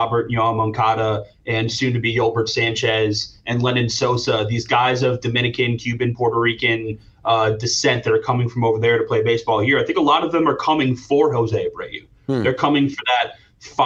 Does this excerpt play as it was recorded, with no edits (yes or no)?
yes